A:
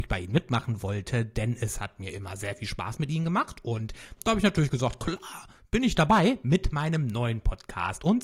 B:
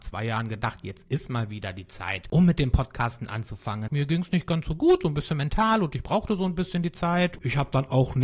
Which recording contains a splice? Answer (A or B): B